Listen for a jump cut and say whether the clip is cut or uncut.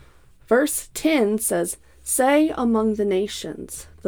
uncut